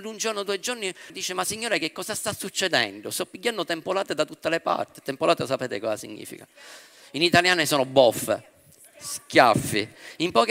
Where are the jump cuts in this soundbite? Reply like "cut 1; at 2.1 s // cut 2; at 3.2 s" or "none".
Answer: cut 1; at 1.1 s

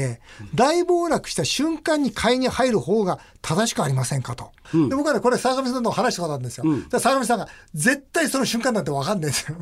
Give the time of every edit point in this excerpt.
cut 1; at 4.6 s

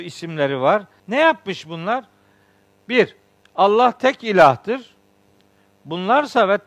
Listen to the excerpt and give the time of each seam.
cut 1; at 1.0 s

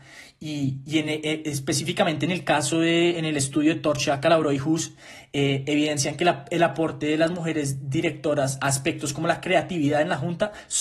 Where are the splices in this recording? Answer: none

